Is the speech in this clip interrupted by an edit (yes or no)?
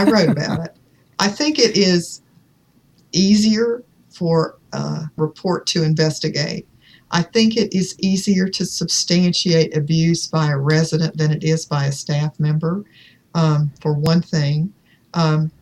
yes